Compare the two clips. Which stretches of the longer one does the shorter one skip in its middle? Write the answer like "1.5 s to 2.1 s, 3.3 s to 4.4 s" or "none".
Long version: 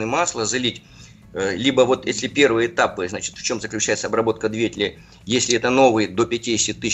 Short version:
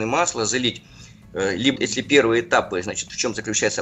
1.8 s to 2.0 s